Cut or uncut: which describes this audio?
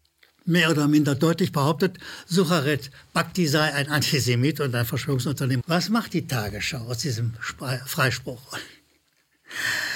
cut